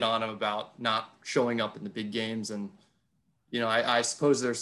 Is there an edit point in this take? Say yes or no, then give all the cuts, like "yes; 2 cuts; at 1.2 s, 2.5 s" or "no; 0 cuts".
no; 0 cuts